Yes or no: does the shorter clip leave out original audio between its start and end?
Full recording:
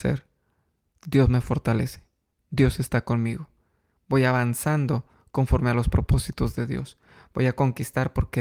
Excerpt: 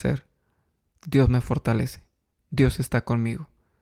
no